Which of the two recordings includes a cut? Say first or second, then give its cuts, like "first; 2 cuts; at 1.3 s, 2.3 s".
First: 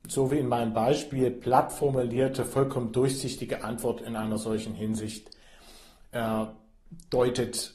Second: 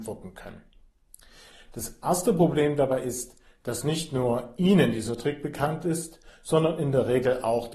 second; 1 cut; at 1.5 s